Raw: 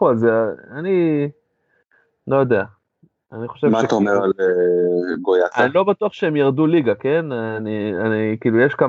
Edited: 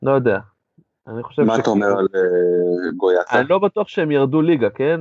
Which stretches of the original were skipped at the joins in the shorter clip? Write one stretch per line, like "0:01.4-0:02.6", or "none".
none